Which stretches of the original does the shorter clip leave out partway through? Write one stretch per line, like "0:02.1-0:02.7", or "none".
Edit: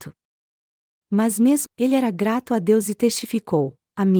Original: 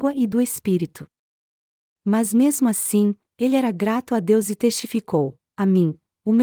0:02.6-0:03.3